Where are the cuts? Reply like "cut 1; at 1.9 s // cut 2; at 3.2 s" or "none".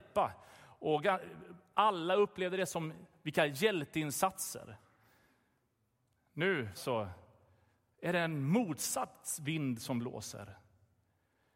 cut 1; at 6.7 s